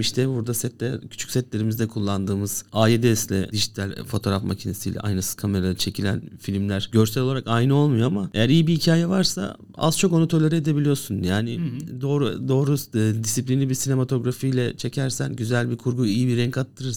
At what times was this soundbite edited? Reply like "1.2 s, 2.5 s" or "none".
none